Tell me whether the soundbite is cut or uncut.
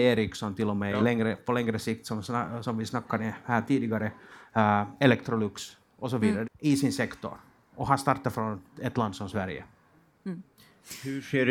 cut